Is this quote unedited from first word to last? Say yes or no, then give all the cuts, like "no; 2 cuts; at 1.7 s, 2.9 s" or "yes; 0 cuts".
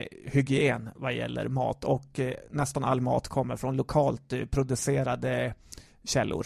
yes; 0 cuts